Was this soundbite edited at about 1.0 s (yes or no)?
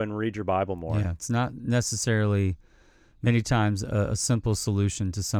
no